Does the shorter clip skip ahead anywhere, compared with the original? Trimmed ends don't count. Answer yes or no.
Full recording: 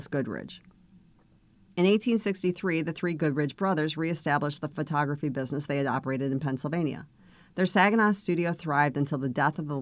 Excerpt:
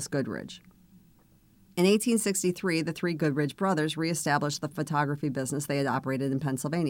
no